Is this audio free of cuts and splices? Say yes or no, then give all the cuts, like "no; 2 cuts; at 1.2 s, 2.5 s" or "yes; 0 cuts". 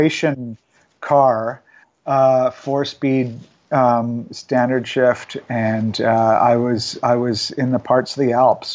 yes; 0 cuts